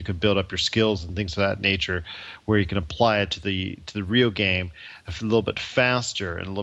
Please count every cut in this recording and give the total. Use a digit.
0